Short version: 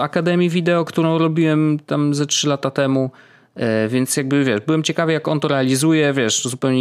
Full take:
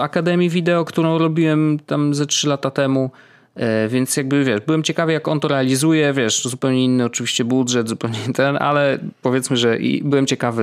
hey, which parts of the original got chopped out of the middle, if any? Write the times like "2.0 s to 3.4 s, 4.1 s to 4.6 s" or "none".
none

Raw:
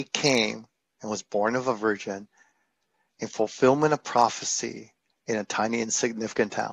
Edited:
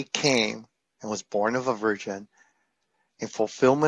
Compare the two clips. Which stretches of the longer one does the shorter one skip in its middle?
none

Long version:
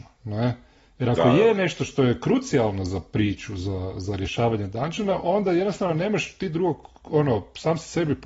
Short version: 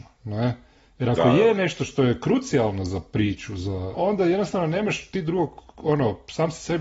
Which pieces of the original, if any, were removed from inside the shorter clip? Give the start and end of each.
3.9 s to 5.2 s

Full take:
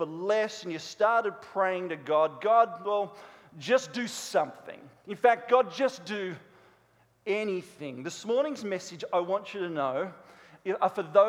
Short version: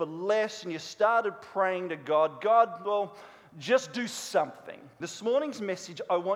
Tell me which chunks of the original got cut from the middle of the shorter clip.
5.0 s to 8.0 s

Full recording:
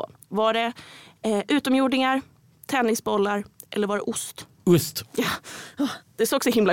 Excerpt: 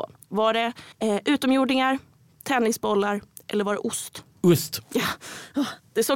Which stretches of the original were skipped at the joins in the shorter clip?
0.9 s to 1.1 s

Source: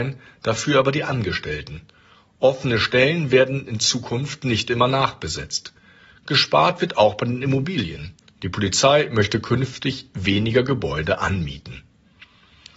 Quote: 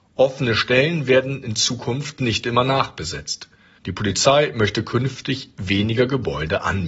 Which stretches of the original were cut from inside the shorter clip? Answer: 6.0 s to 8.3 s

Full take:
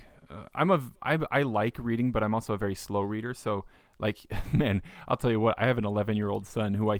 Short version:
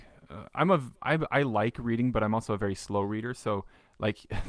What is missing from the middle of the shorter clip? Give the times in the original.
none

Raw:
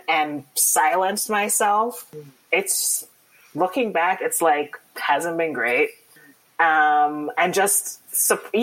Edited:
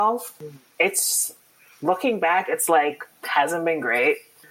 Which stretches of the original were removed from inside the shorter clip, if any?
none

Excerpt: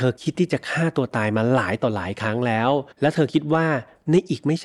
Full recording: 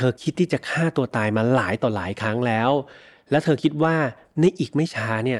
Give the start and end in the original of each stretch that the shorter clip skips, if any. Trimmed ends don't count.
2.9 s to 3.2 s

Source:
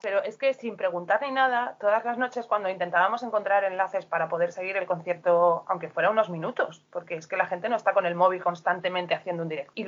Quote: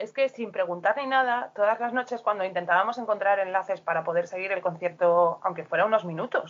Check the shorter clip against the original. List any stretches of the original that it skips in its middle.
none

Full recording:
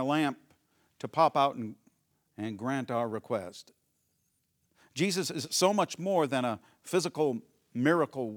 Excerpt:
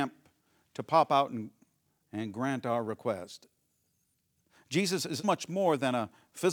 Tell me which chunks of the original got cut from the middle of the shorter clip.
5.5 s to 5.7 s

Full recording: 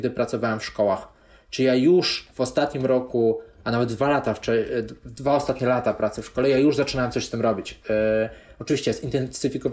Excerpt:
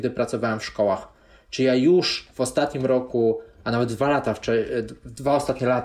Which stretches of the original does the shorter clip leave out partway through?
none

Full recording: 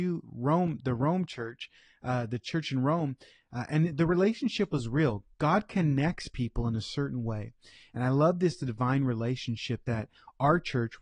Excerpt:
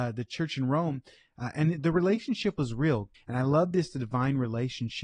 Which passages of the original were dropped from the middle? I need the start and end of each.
5.3 s to 7.8 s

